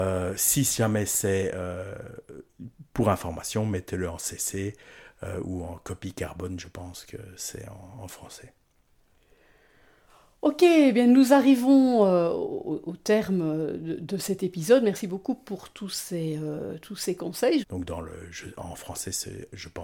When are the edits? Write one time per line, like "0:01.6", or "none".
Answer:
0:17.6